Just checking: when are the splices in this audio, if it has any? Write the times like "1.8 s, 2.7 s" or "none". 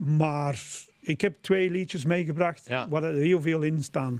none